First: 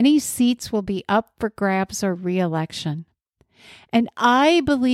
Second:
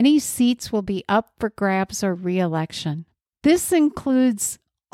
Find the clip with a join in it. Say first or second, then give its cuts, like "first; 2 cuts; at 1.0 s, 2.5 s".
second; 1 cut; at 3.3 s